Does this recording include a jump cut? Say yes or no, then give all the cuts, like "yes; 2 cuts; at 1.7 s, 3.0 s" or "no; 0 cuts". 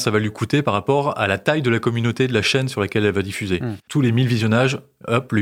yes; 1 cut; at 3.9 s